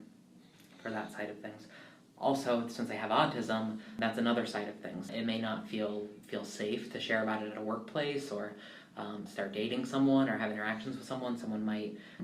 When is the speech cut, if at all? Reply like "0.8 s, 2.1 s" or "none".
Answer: 5.1 s, 9.3 s